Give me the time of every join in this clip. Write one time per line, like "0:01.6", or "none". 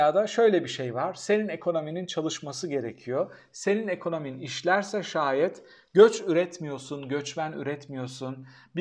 none